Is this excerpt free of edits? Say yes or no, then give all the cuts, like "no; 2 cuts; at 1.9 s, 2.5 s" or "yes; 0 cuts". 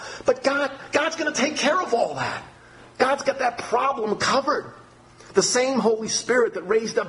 yes; 0 cuts